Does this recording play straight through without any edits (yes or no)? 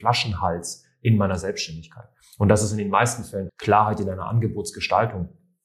no